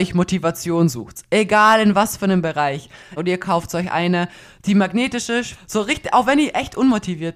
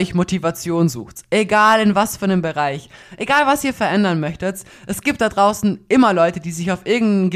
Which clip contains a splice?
first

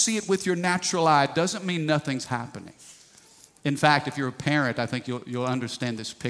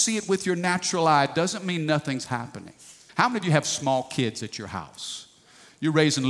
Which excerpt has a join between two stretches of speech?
second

